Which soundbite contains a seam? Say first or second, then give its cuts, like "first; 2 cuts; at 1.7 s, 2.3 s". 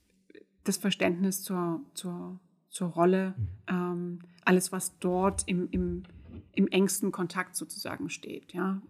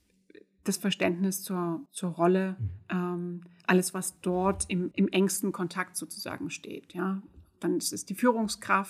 second; 2 cuts; at 1.9 s, 4.9 s